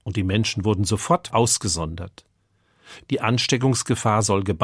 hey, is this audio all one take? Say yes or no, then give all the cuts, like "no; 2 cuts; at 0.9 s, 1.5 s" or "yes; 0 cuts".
no; 2 cuts; at 1.3 s, 3.0 s